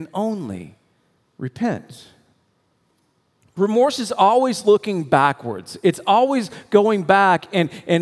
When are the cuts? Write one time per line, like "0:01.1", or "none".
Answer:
0:03.4